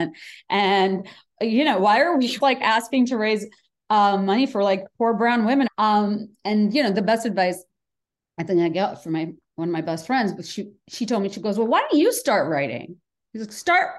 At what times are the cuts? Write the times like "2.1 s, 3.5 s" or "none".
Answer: 2.4 s, 5.7 s